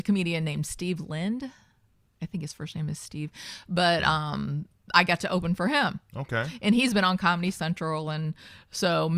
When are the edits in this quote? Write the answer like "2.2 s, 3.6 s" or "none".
none